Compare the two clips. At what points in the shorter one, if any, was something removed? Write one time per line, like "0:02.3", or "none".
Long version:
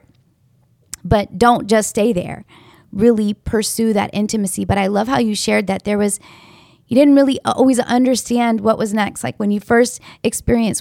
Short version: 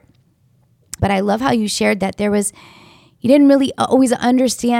0:01.0